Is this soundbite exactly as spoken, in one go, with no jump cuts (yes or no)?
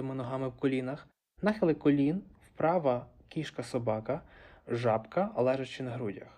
no